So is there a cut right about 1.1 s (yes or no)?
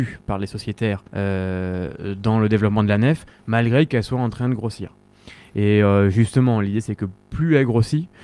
yes